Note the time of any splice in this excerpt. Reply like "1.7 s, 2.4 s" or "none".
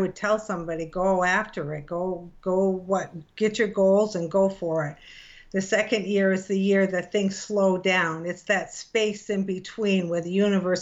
none